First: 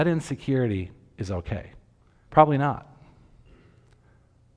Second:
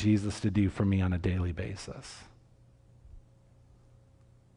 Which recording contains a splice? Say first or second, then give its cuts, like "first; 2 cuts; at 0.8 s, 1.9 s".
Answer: first; 1 cut; at 2.2 s